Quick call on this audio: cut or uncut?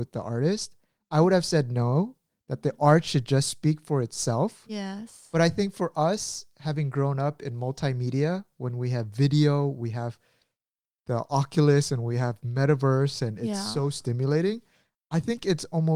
uncut